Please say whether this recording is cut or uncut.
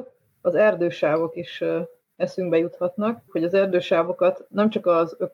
cut